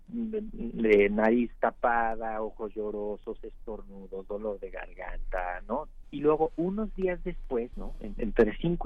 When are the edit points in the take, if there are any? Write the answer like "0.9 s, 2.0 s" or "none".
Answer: 6.0 s, 7.7 s